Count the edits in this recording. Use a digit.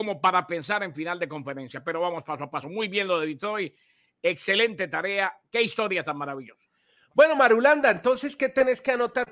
0